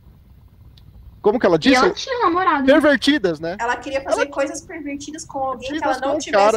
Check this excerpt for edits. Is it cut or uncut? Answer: uncut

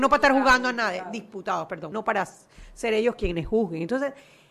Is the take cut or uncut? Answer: cut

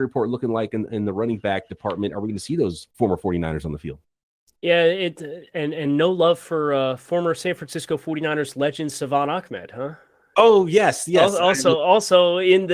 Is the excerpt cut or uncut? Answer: uncut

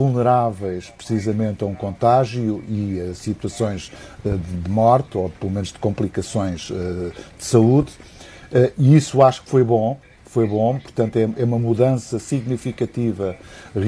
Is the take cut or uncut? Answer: uncut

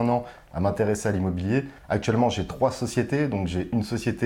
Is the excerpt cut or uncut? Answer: cut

